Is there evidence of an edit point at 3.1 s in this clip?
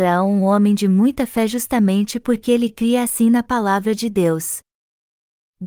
no; 0 cuts

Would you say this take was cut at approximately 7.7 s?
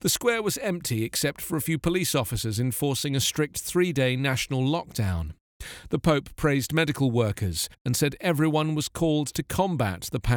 yes; 1 cut; at 7.7 s

